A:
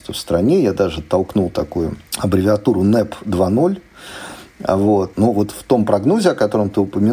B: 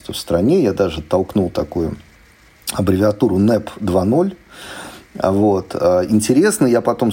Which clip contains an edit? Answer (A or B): A